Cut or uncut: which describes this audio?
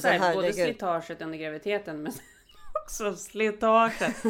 uncut